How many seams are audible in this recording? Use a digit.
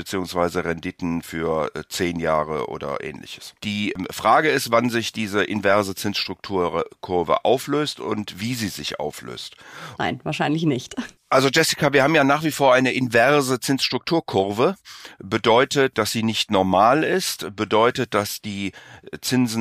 1